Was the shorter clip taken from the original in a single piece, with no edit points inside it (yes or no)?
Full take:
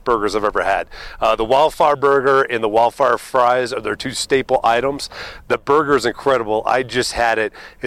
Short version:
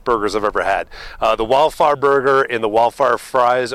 yes